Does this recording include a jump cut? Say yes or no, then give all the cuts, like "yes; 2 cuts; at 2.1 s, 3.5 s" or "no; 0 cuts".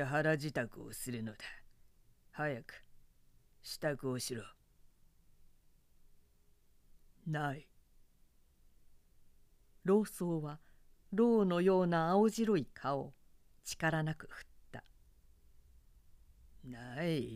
no; 0 cuts